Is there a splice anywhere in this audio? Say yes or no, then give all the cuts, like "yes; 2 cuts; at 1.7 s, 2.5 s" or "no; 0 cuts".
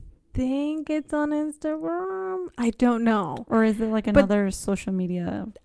no; 0 cuts